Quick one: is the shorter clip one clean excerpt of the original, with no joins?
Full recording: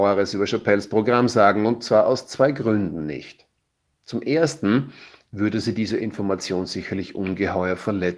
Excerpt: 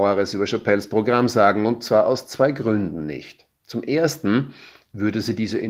no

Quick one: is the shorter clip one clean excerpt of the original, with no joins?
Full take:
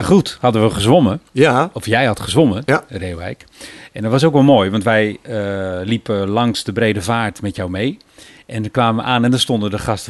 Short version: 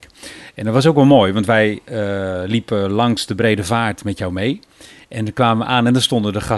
yes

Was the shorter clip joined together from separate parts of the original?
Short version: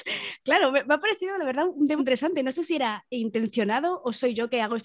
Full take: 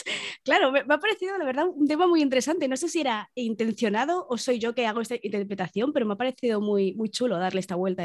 yes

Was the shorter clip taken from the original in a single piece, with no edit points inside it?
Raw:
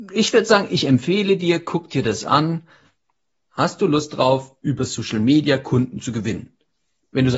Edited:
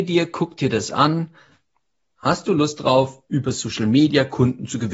yes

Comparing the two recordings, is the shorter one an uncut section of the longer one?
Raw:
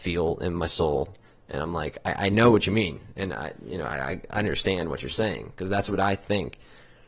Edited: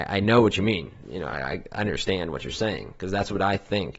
no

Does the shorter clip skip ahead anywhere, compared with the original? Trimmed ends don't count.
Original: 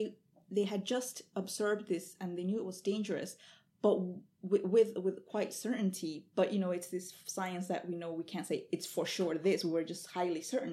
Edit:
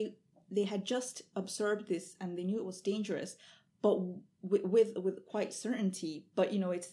no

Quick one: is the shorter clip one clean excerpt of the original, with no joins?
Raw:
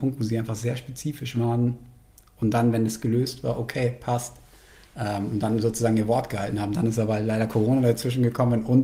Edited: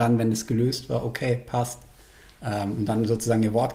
yes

